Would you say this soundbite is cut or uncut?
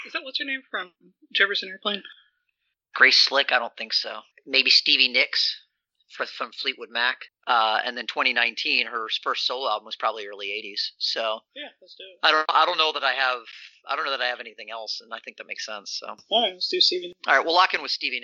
cut